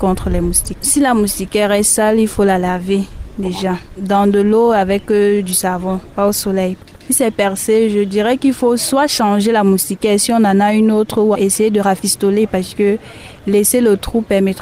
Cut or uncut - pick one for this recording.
cut